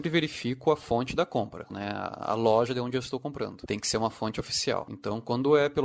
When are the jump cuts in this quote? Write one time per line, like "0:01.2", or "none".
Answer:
0:01.7